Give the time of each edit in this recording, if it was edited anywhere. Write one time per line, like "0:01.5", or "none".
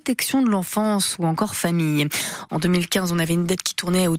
0:02.5